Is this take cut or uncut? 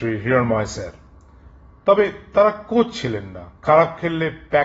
cut